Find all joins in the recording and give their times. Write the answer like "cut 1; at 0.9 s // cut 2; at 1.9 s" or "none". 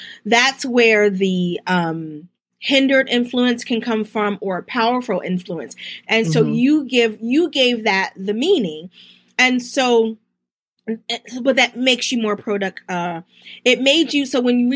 cut 1; at 6.0 s